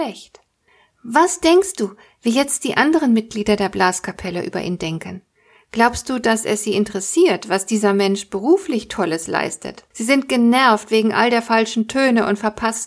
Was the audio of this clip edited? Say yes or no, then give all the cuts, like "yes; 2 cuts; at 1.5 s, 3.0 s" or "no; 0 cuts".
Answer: yes; 1 cut; at 9.9 s